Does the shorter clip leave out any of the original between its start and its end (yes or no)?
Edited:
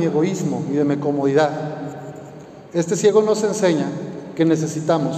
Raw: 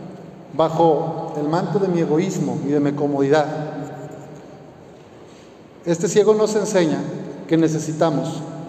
yes